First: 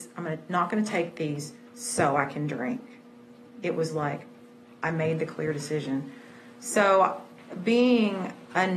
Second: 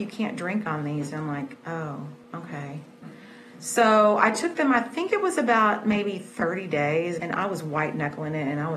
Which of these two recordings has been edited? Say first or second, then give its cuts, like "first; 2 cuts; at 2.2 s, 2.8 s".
second; 2 cuts; at 2.2 s, 7.2 s